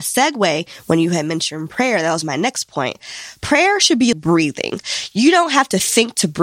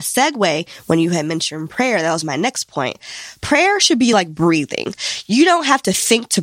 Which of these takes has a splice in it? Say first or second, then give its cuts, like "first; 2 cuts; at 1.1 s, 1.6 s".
first; 1 cut; at 4.1 s